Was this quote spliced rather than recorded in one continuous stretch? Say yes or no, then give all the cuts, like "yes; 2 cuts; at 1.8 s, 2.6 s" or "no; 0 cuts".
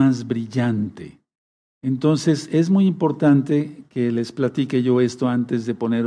no; 0 cuts